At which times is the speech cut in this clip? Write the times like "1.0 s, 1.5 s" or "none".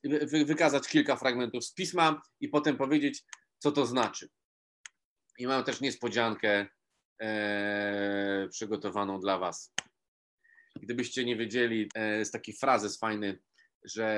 11.9 s